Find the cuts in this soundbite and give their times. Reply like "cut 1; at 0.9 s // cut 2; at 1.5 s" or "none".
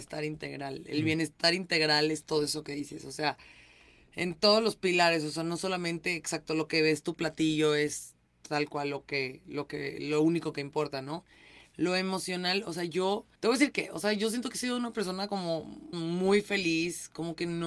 cut 1; at 13.4 s // cut 2; at 15.9 s